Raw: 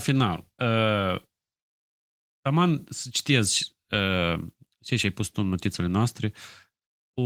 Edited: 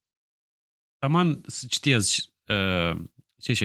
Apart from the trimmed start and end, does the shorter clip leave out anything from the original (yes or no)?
no